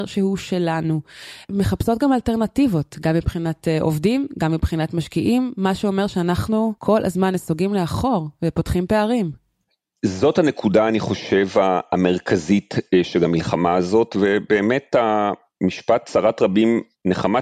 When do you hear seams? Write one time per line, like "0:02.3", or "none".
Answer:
0:01.4
0:06.8